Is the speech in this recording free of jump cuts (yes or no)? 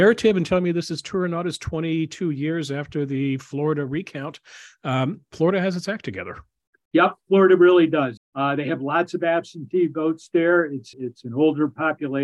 no